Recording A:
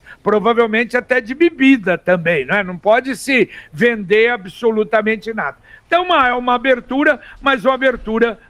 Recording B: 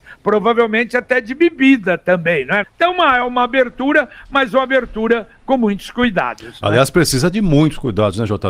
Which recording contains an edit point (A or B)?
B